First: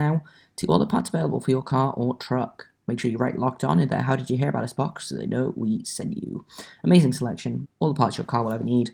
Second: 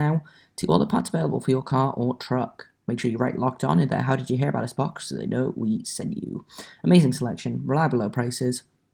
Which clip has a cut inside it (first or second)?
first